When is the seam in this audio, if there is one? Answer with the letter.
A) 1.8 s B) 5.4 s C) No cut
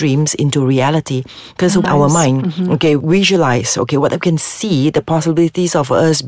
A